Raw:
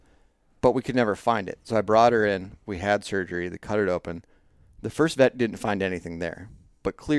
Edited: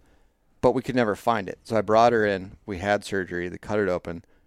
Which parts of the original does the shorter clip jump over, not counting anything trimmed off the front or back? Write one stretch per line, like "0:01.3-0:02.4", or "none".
none